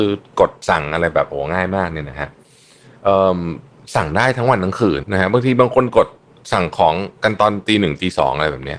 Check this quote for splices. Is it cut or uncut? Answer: cut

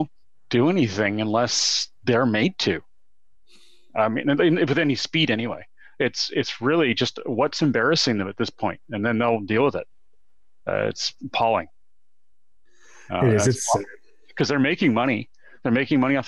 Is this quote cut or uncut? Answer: uncut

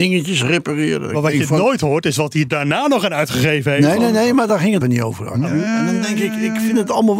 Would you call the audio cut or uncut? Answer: cut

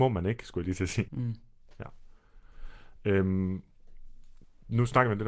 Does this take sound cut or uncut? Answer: cut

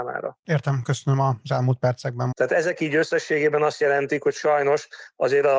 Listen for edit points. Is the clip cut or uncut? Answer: cut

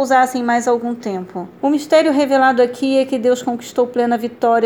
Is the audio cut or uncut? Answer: cut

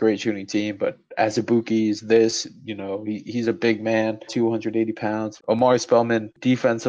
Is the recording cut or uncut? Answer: cut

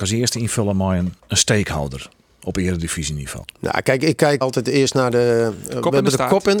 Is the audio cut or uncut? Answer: cut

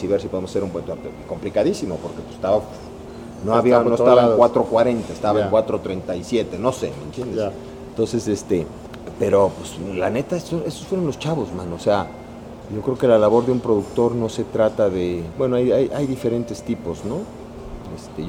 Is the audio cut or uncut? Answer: uncut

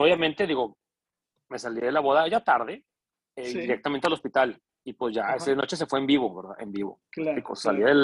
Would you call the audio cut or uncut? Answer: uncut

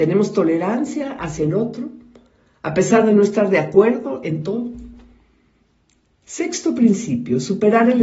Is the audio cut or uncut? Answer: uncut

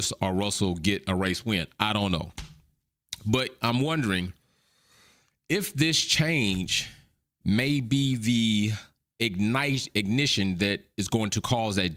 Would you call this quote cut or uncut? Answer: uncut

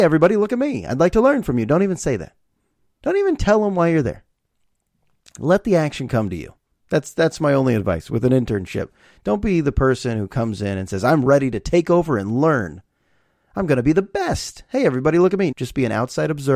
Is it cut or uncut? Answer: cut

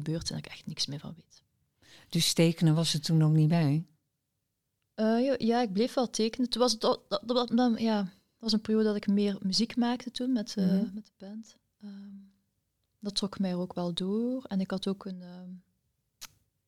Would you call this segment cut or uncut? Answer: uncut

